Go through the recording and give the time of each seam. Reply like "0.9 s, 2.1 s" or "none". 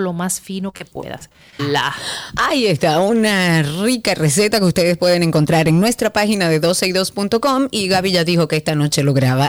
1.6 s